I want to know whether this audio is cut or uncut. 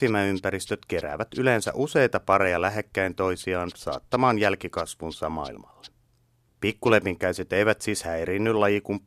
uncut